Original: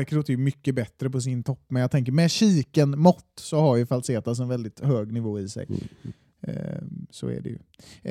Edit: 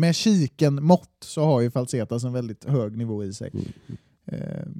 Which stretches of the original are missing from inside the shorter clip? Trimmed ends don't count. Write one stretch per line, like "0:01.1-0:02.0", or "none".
none